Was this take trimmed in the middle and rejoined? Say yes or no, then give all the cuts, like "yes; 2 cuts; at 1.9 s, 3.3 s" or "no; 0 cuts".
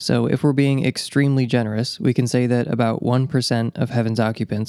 no; 0 cuts